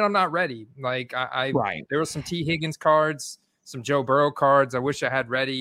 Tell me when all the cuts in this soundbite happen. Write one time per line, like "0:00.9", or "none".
none